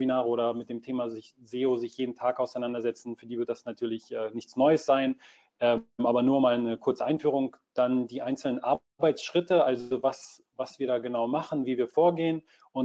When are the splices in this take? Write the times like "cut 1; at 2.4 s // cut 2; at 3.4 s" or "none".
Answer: none